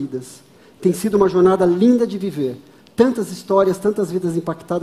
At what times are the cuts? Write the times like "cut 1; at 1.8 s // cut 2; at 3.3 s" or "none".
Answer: none